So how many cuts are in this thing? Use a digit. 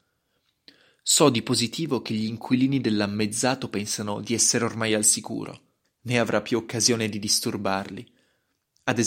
1